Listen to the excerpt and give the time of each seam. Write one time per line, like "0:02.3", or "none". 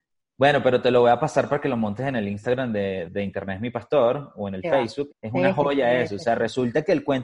0:03.1
0:05.1